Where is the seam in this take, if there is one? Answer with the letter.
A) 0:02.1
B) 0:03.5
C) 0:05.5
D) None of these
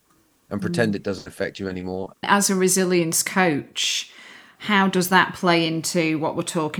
A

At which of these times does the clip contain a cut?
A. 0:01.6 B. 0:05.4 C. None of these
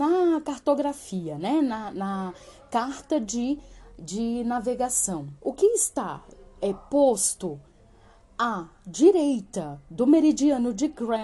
B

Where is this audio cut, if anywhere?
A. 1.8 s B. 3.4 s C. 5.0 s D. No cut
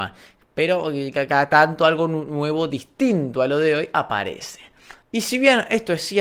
C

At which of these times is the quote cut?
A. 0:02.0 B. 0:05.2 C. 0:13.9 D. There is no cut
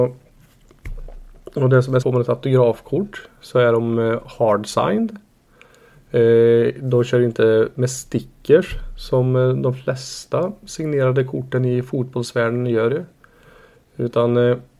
A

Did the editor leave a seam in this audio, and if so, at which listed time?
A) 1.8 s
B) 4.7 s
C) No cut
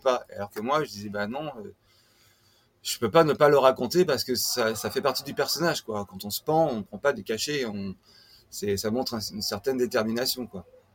B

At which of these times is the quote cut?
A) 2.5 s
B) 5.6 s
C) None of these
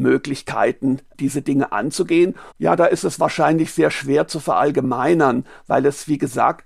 A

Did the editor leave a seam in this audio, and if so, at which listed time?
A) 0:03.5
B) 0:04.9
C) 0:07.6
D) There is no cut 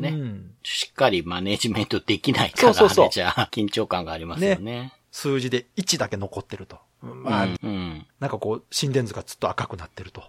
C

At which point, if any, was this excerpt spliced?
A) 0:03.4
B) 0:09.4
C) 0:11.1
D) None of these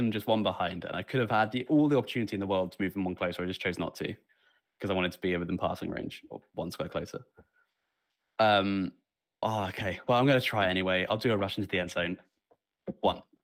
B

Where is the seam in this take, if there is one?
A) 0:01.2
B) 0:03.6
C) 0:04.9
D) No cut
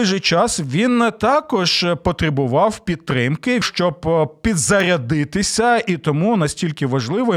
B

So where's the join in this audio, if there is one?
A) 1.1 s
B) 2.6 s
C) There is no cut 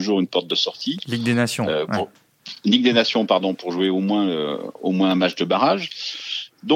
C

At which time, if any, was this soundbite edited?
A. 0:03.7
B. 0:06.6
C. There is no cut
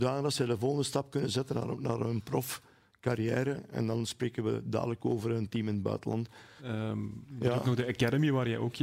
B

